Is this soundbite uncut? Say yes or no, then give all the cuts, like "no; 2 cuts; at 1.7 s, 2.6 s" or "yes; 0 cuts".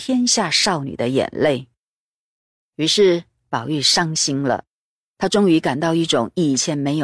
yes; 0 cuts